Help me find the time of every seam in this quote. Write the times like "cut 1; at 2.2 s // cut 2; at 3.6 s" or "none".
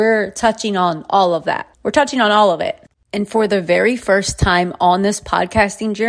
cut 1; at 1.7 s